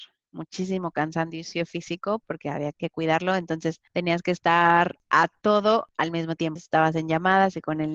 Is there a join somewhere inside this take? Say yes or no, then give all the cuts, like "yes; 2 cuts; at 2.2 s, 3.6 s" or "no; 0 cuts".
yes; 2 cuts; at 2.7 s, 6.6 s